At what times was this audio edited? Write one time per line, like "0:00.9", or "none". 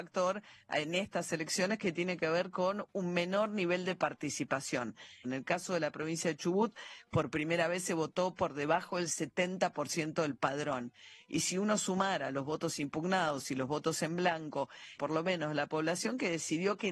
0:05.2
0:15.0

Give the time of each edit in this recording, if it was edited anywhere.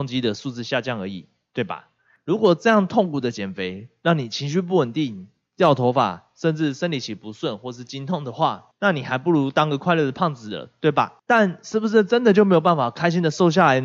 none

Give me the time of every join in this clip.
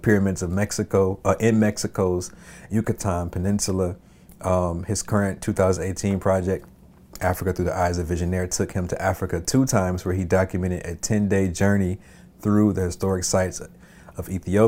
none

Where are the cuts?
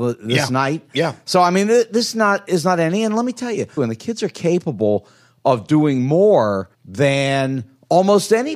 0:03.8
0:06.7

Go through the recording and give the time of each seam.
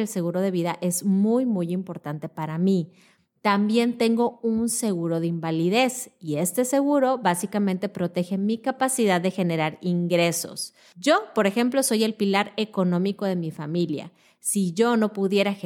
none

